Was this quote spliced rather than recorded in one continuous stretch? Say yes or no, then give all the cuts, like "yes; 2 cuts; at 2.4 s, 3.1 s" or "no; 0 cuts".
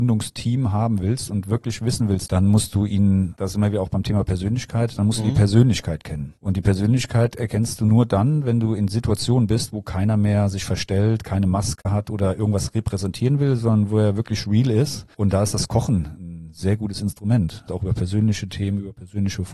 yes; 2 cuts; at 2.3 s, 17.7 s